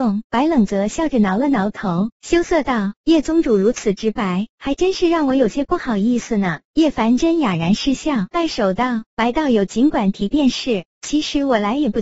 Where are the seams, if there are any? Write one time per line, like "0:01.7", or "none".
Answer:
0:08.3